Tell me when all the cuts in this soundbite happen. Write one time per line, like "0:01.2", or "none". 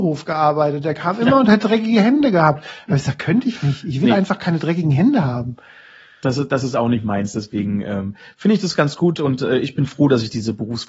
none

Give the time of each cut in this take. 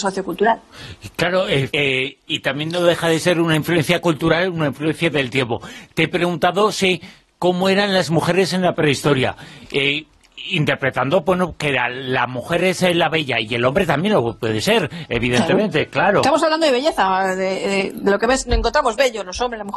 0:01.7

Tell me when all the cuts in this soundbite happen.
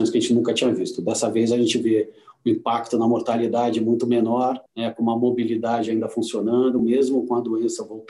0:04.7
0:06.8

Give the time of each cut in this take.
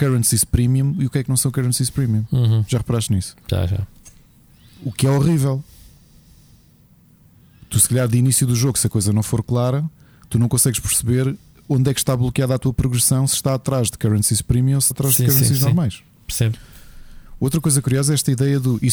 0:14.9

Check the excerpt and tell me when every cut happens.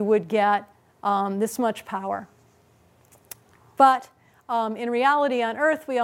none

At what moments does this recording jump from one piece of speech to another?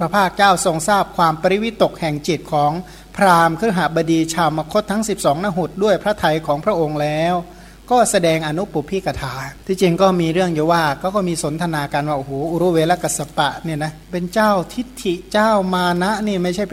0:09.6
0:14.0

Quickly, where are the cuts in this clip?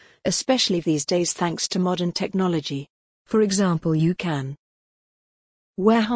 none

